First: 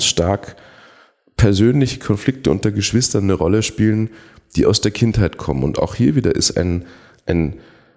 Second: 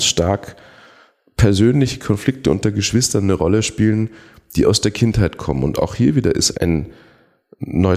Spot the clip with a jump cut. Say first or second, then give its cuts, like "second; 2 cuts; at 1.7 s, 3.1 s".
second; 1 cut; at 6.5 s